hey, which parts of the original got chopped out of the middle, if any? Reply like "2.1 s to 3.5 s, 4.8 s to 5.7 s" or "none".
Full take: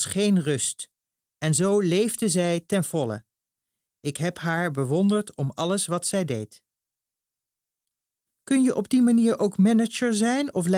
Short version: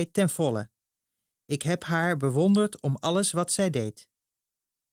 none